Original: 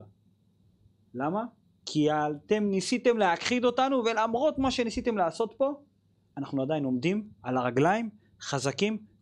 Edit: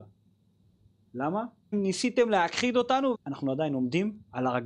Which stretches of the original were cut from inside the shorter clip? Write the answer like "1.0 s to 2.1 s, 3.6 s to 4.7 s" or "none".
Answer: 1.7 s to 2.6 s, 4.0 s to 6.2 s